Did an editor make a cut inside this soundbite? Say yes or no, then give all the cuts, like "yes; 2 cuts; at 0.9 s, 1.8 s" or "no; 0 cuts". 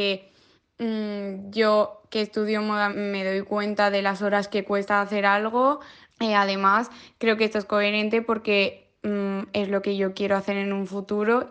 yes; 2 cuts; at 2.9 s, 6.1 s